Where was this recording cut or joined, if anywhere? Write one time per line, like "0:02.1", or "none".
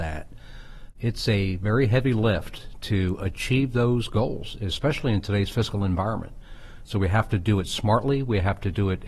none